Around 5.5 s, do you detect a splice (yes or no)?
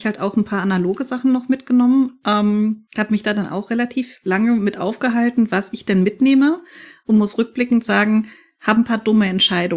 no